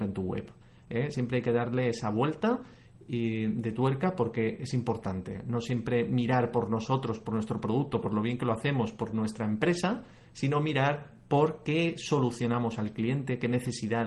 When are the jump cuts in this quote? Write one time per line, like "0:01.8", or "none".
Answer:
none